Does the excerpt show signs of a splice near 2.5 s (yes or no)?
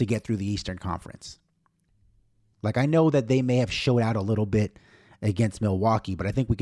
yes